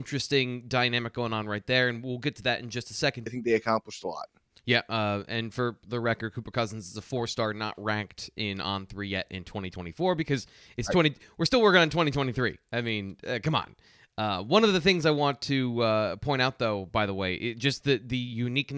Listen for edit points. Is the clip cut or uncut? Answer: cut